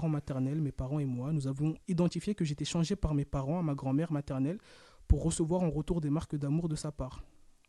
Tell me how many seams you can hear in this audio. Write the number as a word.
zero